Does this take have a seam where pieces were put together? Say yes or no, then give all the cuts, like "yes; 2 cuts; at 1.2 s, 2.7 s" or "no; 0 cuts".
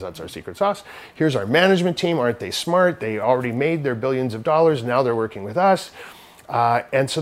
no; 0 cuts